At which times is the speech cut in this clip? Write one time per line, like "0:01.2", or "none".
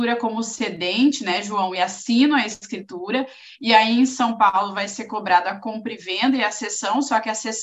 none